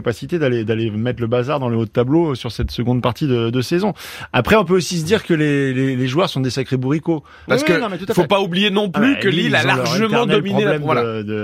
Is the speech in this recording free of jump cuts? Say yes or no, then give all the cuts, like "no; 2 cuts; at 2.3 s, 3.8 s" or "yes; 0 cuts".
no; 1 cut; at 7.5 s